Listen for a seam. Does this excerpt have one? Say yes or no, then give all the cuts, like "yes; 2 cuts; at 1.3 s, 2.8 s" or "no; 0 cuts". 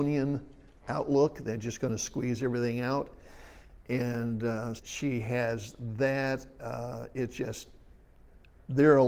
yes; 1 cut; at 4.8 s